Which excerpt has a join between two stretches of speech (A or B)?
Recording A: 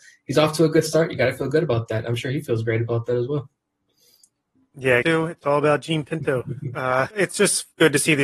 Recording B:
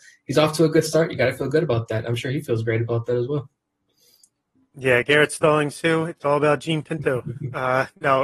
A